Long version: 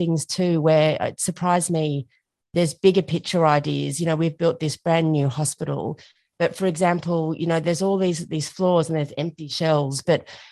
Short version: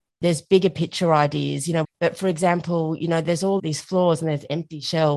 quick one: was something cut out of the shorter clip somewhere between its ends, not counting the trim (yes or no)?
yes